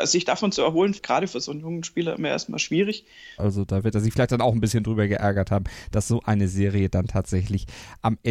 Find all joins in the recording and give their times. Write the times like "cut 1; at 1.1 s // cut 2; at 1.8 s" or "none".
cut 1; at 1.0 s // cut 2; at 3.4 s